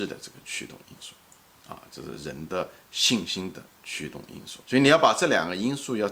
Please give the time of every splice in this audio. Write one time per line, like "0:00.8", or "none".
0:04.6